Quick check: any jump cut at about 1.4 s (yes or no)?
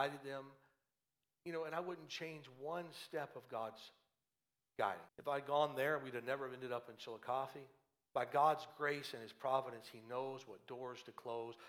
no